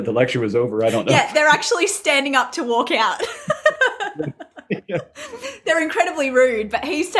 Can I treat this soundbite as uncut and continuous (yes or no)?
yes